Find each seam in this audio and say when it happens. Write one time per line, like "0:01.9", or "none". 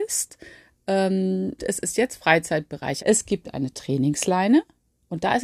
0:01.6
0:03.0